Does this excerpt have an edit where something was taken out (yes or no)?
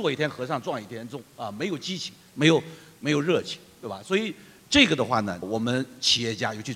yes